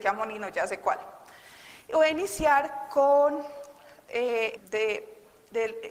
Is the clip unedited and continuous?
no; 1 cut; at 4.6 s

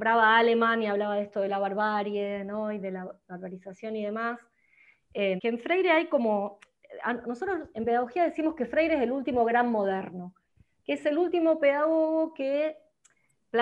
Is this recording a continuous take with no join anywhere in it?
no; 1 cut; at 5.4 s

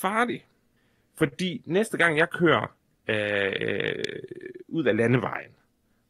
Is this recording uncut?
yes; 0 cuts

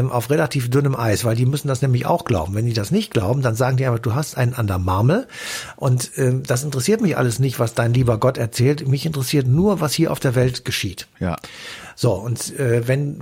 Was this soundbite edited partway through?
no; 0 cuts

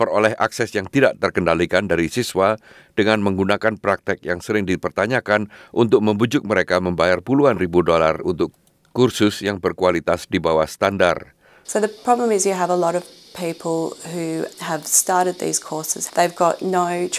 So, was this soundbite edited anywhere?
yes; 3 cuts; at 11.6 s, 14.5 s, 16.1 s

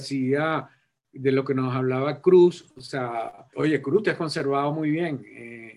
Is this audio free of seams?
no; 1 cut; at 3.5 s

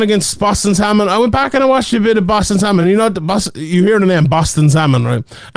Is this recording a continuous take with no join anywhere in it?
yes; 0 cuts

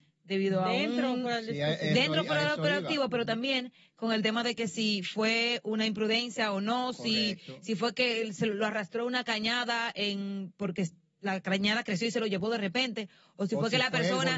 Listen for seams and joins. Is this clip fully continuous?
yes; 0 cuts

